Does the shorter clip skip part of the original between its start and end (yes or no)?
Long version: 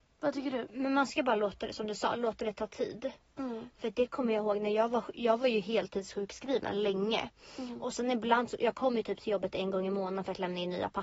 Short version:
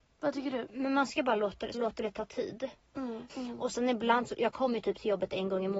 yes